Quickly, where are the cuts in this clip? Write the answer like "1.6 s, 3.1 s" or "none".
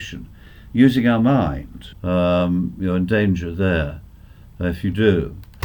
1.9 s